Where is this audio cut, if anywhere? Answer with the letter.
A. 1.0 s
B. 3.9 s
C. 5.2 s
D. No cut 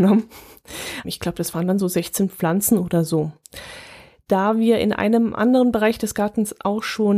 A